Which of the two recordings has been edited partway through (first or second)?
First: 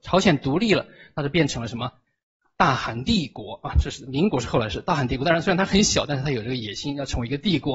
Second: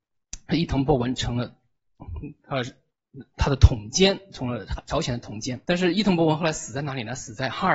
second